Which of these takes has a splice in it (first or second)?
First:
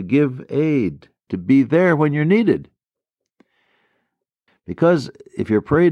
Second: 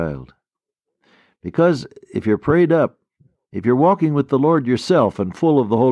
first